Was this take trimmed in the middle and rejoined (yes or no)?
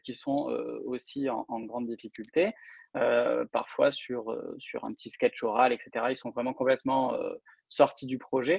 no